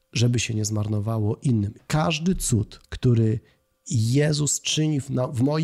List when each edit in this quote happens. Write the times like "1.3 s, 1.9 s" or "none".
1.8 s, 2.8 s